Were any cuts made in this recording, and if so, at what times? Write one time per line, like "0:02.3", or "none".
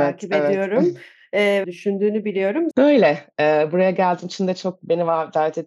0:01.6
0:02.7